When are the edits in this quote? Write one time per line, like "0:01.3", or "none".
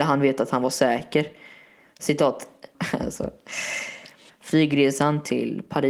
0:02.7
0:04.3